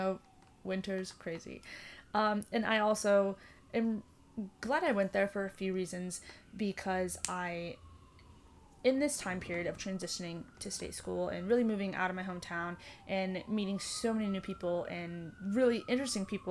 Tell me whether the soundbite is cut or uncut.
uncut